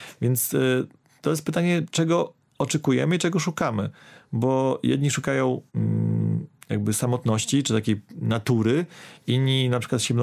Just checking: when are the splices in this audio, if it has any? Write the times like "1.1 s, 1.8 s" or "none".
5.7 s